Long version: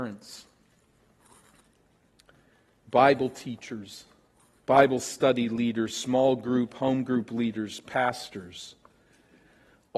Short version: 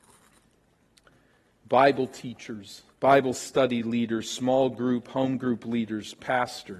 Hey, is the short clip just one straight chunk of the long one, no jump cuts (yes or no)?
no